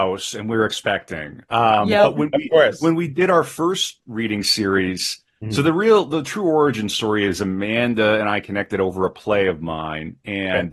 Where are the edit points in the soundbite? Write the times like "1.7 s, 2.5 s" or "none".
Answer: none